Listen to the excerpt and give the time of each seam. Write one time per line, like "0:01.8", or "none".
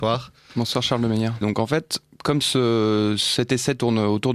0:01.4